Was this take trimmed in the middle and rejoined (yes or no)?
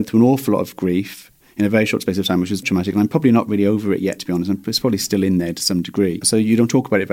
yes